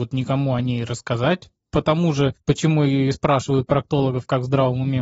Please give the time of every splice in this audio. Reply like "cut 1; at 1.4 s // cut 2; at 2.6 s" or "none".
cut 1; at 1.6 s

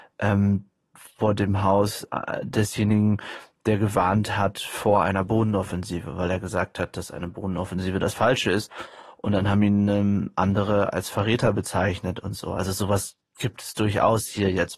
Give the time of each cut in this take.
none

